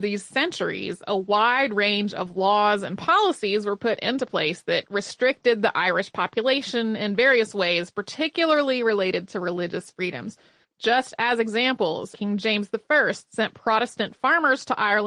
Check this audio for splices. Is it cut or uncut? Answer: cut